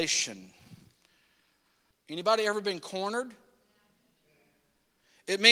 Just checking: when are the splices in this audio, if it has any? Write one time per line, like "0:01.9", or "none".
0:01.9